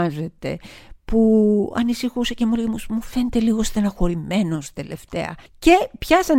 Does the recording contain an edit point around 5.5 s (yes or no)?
yes